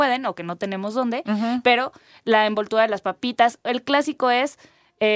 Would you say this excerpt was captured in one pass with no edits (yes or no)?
yes